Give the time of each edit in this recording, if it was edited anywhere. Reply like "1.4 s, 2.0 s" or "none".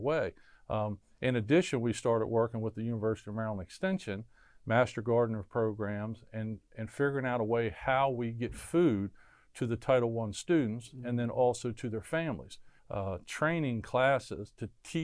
12.8 s